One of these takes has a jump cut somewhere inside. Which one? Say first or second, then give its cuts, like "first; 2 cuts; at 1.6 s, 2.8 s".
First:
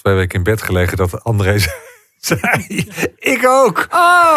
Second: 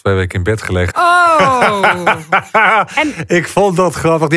second; 1 cut; at 0.9 s